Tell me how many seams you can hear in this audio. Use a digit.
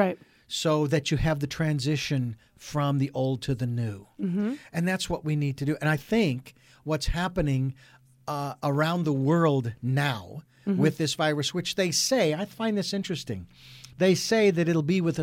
0